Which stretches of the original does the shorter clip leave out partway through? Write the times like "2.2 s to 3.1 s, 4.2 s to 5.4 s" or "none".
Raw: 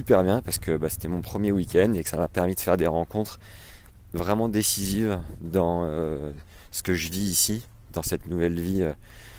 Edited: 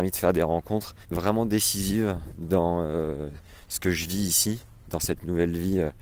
3.5 s to 4.0 s